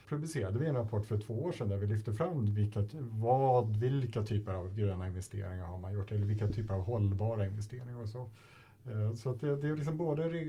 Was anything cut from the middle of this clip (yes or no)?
no